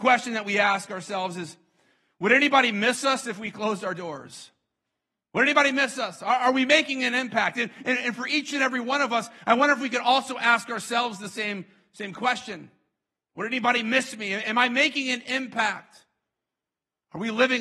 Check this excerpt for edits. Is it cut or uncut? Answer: uncut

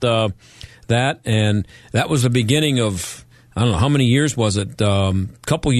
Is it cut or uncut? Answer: uncut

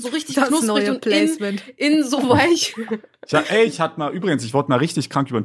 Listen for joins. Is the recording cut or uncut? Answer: uncut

